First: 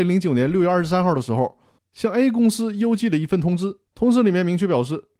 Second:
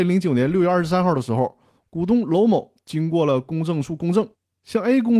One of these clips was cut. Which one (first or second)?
first